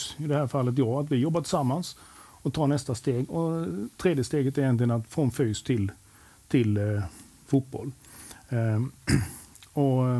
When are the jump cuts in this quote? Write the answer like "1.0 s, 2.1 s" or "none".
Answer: none